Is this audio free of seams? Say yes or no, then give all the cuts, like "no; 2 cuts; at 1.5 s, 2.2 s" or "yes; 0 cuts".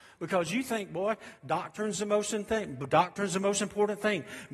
yes; 0 cuts